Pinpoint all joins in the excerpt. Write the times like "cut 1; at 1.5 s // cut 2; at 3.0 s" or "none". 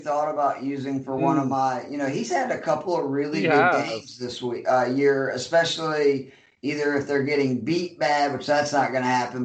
none